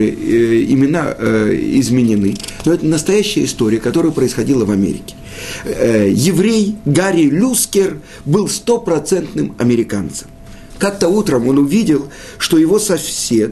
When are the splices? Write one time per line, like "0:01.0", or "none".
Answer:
0:10.7